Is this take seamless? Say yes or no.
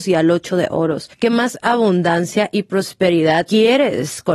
yes